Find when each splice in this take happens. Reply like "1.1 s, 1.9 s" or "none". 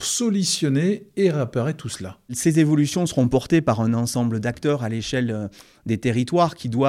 none